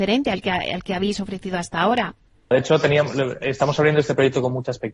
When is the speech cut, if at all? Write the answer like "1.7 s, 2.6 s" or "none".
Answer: 2.5 s